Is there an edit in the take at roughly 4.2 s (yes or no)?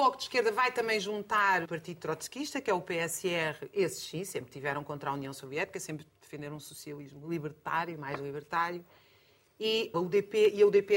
no